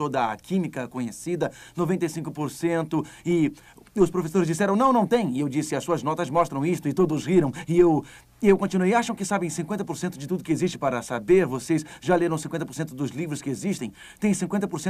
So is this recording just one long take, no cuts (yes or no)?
yes